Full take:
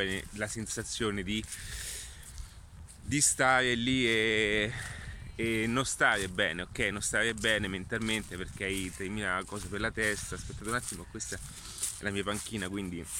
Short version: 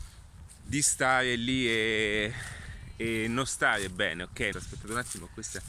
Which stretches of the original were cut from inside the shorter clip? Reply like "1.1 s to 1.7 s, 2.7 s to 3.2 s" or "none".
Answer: 6.9 s to 10.3 s